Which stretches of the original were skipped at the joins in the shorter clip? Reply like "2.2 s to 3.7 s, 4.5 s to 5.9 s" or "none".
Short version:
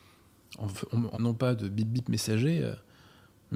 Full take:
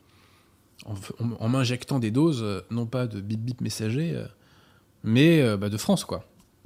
1.4 s to 2.7 s